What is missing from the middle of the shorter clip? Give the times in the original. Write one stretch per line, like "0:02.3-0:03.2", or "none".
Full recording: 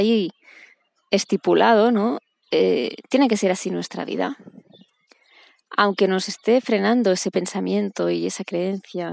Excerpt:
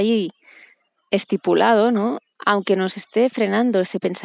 0:02.3-0:05.6